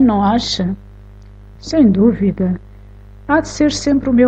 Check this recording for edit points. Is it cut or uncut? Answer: uncut